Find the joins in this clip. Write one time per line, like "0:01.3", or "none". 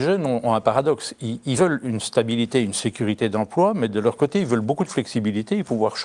none